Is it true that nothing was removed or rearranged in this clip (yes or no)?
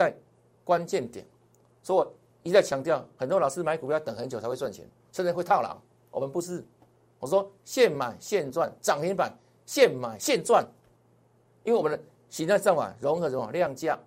yes